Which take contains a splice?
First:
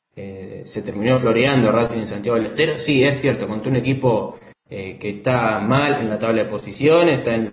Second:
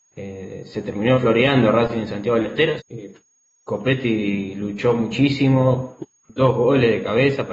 second; 1 cut; at 2.8 s

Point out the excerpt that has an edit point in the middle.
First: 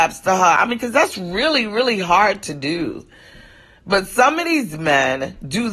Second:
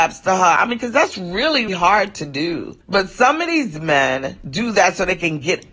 second; 2 cuts; at 1.7 s, 2.8 s

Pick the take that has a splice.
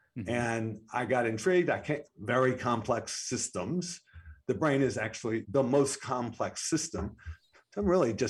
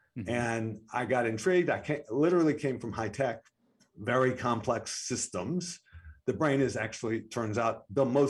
first; 2 cuts; at 2.1 s, 5.4 s

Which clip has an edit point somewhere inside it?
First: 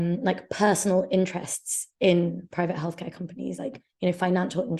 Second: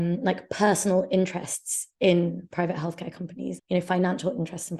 second; 1 cut; at 3.6 s

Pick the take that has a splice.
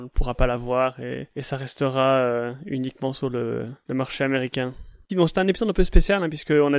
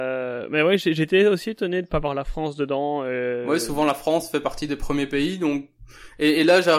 first; 1 cut; at 5.1 s

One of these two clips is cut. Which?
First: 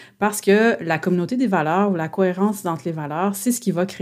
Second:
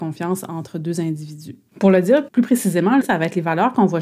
second; 2 cuts; at 1.7 s, 3.0 s

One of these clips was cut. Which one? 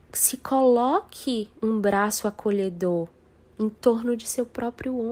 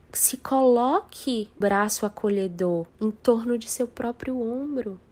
second; 2 cuts; at 1.6 s, 2.9 s

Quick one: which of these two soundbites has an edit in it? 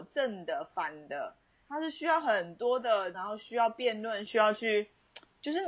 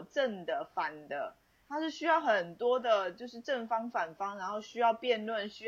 first; 2 cuts; at 3.1 s, 4.3 s

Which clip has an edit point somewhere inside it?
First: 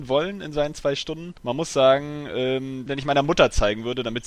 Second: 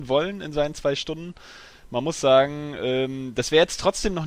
first; 2 cuts; at 1.4 s, 2.9 s

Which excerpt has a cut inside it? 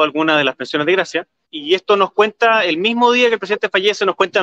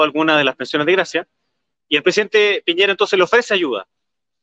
first; 1 cut; at 1.5 s

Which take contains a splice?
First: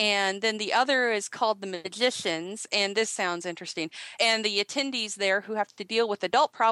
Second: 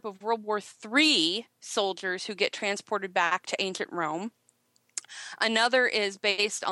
first; 1 cut; at 4.2 s

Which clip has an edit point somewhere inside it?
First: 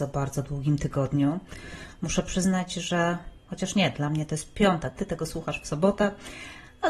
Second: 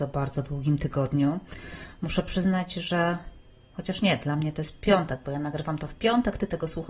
first; 2 cuts; at 3.4 s, 5.0 s

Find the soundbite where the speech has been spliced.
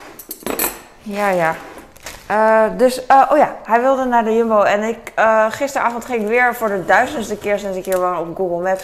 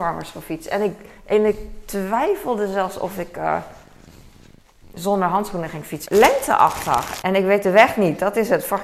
second; 2 cuts; at 6.0 s, 7.2 s

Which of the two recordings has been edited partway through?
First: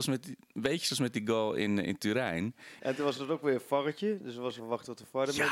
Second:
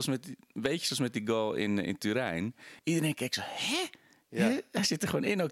first; 2 cuts; at 2.8 s, 4.6 s

